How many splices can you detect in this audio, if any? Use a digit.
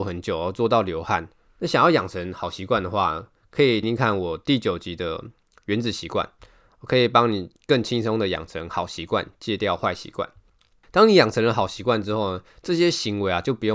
1